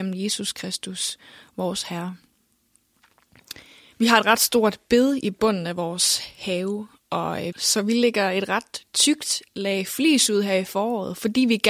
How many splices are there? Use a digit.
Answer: 2